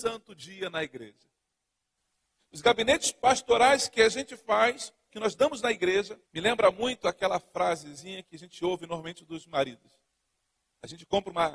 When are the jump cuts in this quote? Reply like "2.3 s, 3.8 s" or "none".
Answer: 5.1 s, 6.2 s